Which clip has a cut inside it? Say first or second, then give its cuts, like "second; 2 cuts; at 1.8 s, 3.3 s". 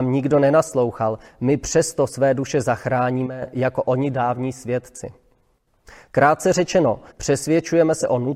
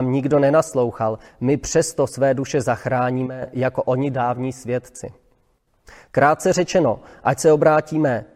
first; 1 cut; at 7.1 s